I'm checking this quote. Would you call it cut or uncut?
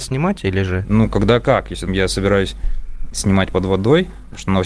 cut